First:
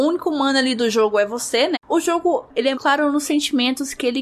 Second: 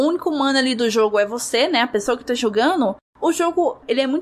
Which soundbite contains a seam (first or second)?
first